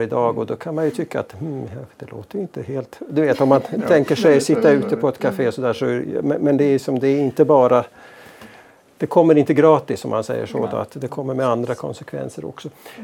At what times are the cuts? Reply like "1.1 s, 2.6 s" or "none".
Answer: none